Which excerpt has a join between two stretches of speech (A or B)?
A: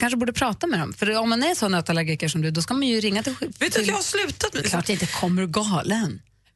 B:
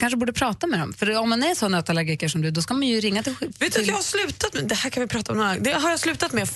A